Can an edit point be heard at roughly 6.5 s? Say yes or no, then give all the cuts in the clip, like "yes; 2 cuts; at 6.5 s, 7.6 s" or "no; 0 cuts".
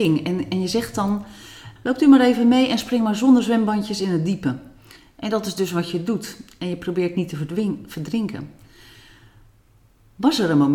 no; 1 cut; at 1.8 s